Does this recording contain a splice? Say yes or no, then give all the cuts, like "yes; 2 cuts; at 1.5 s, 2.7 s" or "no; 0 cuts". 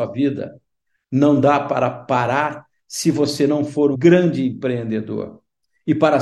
yes; 1 cut; at 3.9 s